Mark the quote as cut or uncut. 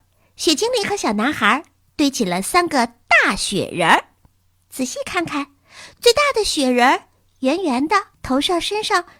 cut